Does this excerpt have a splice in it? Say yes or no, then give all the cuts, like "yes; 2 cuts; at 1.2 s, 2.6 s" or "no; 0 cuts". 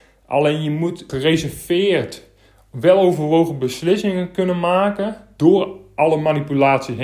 yes; 1 cut; at 1.1 s